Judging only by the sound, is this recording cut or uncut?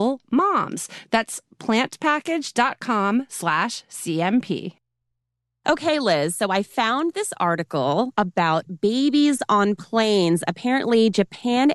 uncut